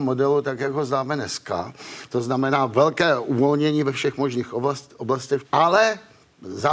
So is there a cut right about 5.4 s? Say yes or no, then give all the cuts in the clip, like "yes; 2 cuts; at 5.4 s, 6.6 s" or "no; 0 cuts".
yes; 1 cut; at 5.4 s